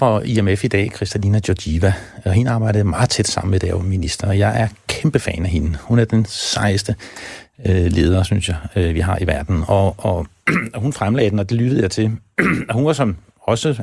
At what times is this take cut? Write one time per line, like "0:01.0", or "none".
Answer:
none